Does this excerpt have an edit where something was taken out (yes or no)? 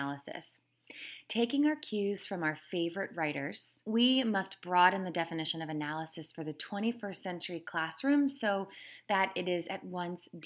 no